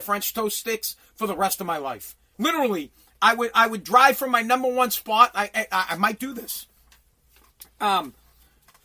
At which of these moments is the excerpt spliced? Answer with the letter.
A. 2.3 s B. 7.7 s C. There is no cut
A